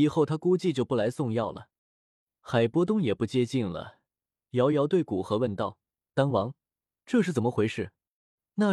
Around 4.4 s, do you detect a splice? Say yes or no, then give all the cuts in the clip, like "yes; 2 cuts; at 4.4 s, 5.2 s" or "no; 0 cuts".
yes; 2 cuts; at 1.8 s, 4.4 s